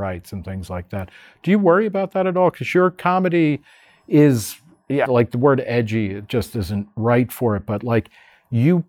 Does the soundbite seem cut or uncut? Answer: cut